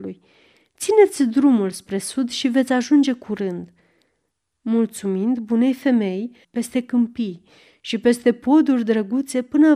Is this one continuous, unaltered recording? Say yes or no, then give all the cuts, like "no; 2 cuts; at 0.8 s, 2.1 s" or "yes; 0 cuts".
no; 1 cut; at 6.4 s